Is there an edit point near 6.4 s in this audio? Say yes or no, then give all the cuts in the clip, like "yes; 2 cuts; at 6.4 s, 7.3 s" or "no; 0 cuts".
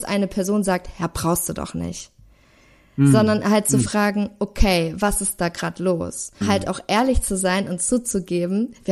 yes; 1 cut; at 6.4 s